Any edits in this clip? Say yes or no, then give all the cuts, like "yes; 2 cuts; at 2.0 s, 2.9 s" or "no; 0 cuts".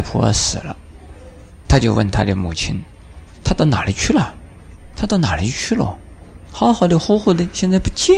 yes; 1 cut; at 6.5 s